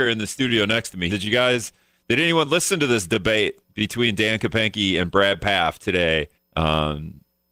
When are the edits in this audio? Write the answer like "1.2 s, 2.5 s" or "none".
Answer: 1.1 s, 6.3 s

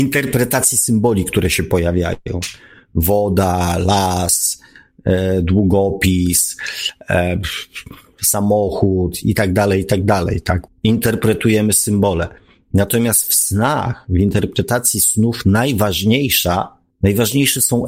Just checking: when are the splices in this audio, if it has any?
10.7 s

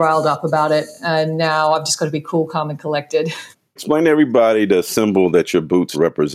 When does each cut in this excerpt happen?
none

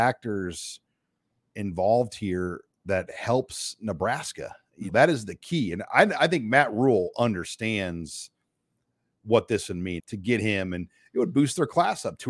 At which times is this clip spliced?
4.9 s, 10.0 s

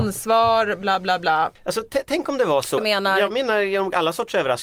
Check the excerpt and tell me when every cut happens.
1.6 s, 2.8 s

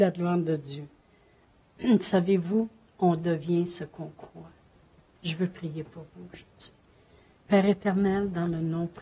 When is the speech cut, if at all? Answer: 5.1 s

